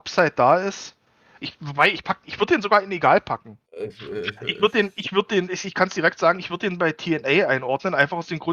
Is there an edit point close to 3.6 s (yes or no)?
yes